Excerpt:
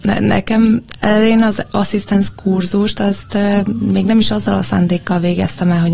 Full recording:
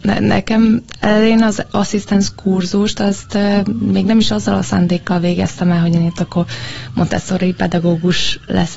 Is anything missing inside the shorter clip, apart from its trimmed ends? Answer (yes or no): no